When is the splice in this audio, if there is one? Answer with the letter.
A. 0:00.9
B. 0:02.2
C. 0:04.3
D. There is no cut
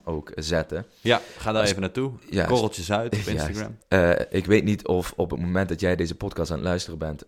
D